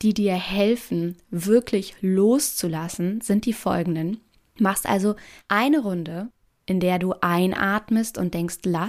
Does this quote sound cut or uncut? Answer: uncut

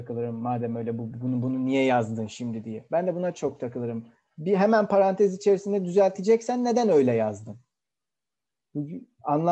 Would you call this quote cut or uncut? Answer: uncut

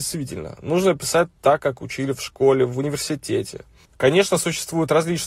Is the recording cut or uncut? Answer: uncut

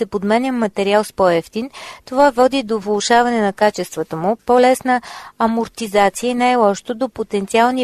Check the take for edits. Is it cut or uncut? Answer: uncut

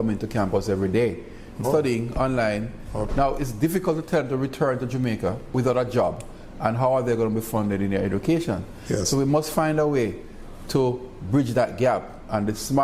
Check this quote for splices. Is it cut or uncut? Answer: cut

